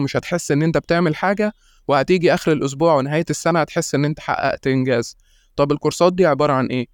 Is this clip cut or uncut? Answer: uncut